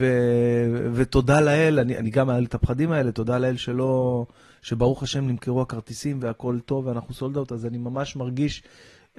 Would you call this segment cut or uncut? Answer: uncut